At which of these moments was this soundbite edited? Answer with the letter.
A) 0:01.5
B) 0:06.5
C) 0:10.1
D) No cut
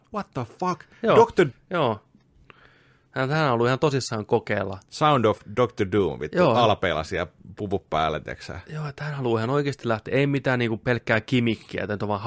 A